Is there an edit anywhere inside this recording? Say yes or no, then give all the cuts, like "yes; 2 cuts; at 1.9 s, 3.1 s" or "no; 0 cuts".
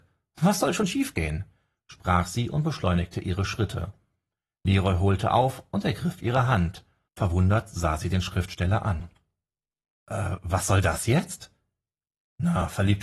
no; 0 cuts